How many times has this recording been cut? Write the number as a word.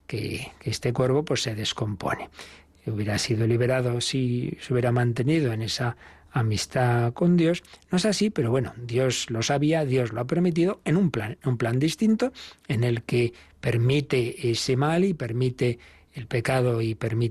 zero